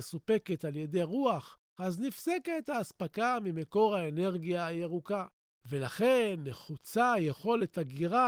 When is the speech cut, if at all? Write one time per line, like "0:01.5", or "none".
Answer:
0:01.8